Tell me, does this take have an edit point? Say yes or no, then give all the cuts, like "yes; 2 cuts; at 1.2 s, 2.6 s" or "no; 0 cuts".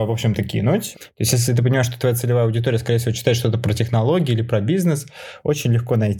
yes; 1 cut; at 0.9 s